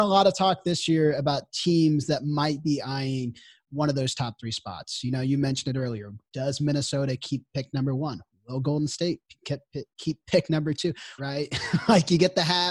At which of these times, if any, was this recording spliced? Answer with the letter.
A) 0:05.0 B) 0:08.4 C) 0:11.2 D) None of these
C